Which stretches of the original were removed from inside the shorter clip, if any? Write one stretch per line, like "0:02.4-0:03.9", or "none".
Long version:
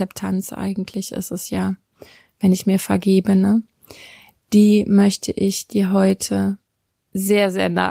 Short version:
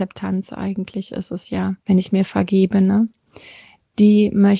0:01.8-0:02.3